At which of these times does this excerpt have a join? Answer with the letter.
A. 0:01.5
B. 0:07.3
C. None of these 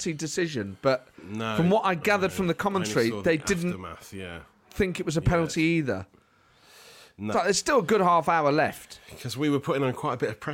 B